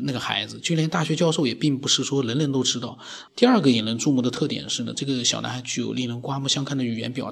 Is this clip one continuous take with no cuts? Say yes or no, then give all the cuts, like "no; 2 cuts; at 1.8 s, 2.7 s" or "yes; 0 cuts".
no; 1 cut; at 3.3 s